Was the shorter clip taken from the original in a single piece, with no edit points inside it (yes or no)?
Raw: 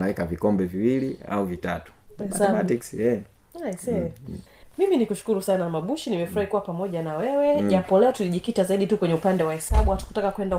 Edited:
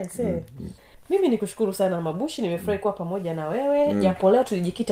yes